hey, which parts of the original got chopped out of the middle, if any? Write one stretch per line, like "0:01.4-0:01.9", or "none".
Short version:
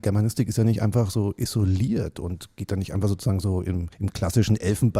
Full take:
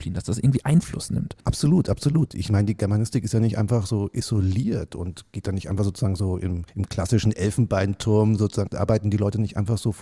none